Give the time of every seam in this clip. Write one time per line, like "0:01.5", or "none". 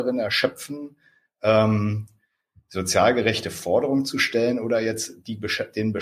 none